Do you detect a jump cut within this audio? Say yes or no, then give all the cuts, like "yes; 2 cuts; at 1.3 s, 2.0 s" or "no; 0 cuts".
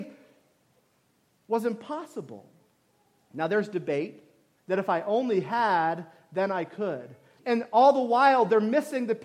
yes; 2 cuts; at 4.6 s, 7.4 s